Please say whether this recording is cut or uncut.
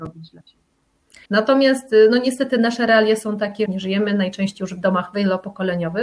cut